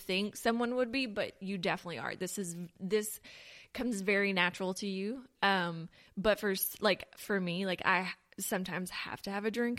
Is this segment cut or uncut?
uncut